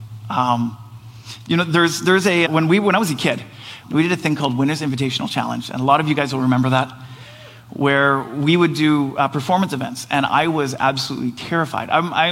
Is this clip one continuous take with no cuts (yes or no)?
no